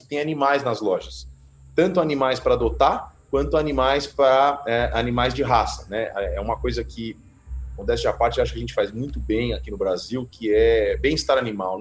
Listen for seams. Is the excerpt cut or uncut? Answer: uncut